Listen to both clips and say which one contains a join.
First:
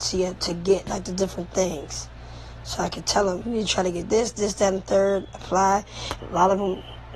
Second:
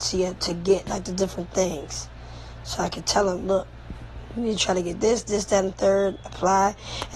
first; 2 cuts; at 3.4 s, 6.2 s

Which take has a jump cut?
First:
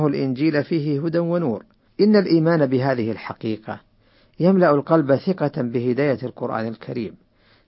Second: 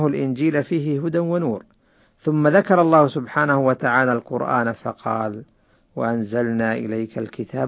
first; 1 cut; at 1.9 s

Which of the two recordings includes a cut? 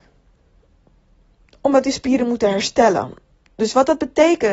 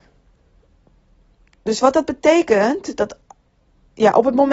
second; 1 cut; at 1.5 s

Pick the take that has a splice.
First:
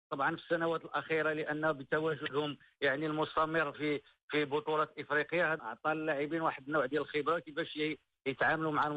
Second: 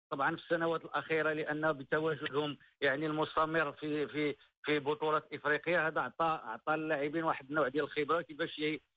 first; 2 cuts; at 3.7 s, 5.6 s

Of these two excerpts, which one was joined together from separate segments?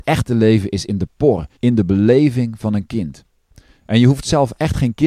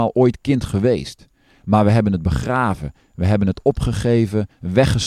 first; 1 cut; at 1.6 s

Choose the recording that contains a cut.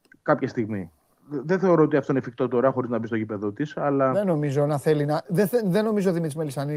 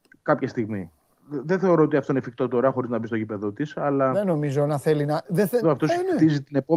second; 1 cut; at 5.6 s

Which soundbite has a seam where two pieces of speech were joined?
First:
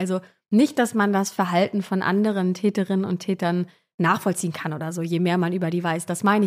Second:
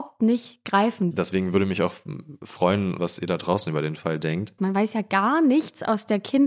second; 3 cuts; at 1.1 s, 3.0 s, 4.6 s

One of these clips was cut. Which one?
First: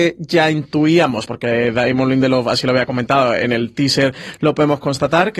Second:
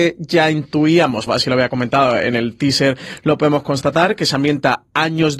second; 1 cut; at 1.3 s

